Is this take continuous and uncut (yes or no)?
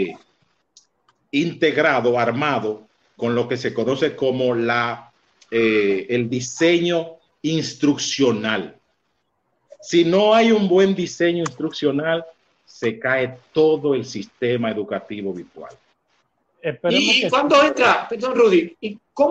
no